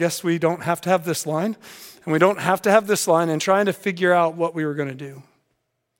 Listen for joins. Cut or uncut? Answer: uncut